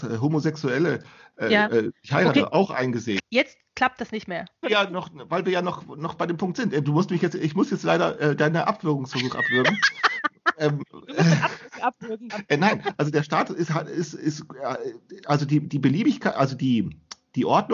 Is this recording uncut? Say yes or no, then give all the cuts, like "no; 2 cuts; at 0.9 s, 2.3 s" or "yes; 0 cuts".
no; 3 cuts; at 3.2 s, 4.6 s, 12.3 s